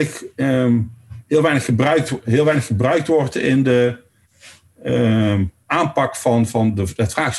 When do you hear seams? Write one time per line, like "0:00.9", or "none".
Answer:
none